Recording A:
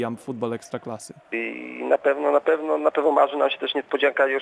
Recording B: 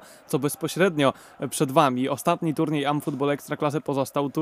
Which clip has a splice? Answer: A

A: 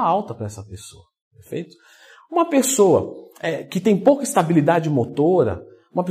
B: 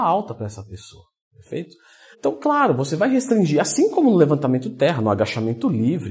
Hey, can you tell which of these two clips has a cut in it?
B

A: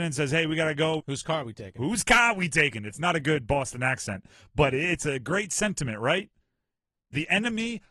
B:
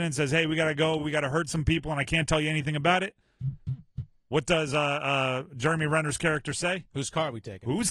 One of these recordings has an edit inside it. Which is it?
A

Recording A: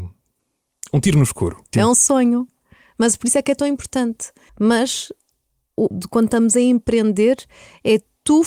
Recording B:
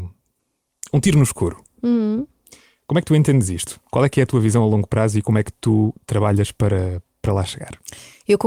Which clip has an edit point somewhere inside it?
A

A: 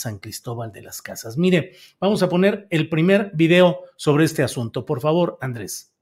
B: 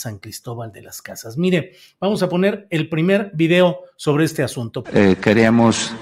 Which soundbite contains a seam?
B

